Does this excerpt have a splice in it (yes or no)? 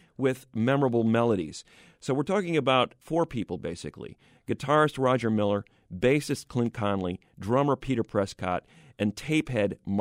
no